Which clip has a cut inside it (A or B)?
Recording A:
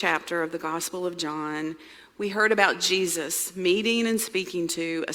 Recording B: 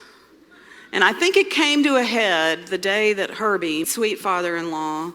B